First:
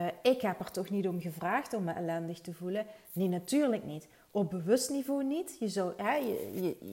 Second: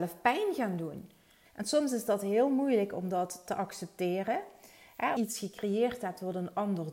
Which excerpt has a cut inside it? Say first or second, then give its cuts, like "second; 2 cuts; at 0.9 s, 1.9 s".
second; 2 cuts; at 1.5 s, 5.2 s